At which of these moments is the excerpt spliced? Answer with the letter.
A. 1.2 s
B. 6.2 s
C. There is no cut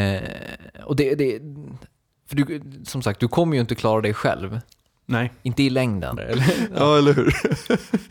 B